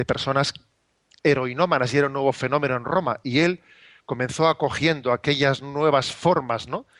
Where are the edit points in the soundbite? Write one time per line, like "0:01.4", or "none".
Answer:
none

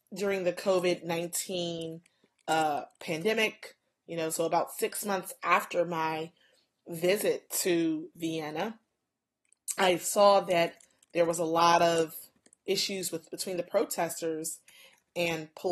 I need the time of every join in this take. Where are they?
none

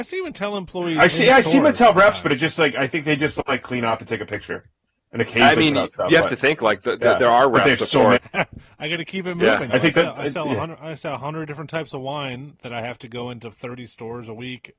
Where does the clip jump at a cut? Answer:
0:08.2
0:09.7

